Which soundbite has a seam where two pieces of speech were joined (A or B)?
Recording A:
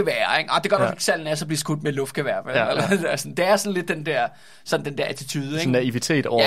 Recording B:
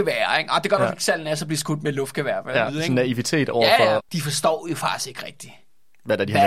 B